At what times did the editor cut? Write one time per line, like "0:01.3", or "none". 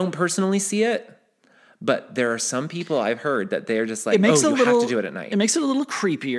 none